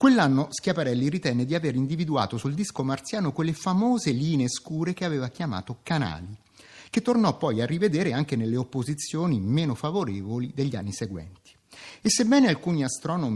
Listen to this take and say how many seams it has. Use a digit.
0